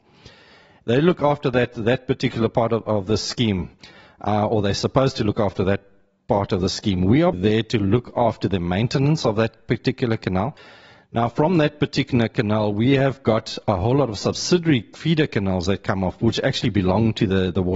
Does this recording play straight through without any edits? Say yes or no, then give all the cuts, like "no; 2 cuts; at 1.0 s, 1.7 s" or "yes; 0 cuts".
no; 1 cut; at 7.3 s